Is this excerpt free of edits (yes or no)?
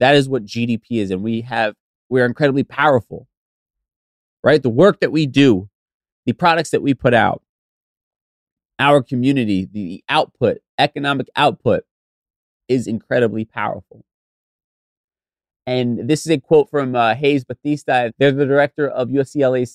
yes